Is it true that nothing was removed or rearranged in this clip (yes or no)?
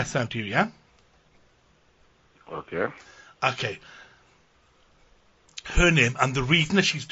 yes